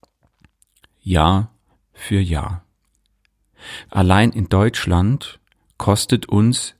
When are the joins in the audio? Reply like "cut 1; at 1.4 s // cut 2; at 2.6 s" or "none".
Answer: cut 1; at 0.9 s // cut 2; at 3.9 s